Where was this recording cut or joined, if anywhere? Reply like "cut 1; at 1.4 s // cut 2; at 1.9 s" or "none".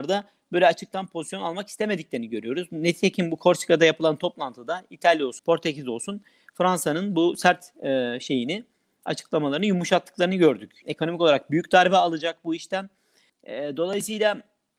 cut 1; at 5.4 s // cut 2; at 10.8 s // cut 3; at 13.3 s